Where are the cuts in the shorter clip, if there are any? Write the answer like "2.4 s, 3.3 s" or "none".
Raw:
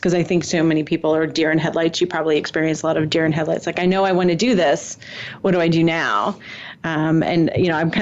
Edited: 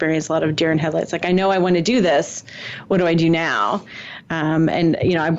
none